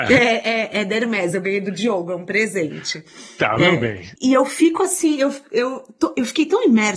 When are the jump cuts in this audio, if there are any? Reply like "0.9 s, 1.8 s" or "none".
4.2 s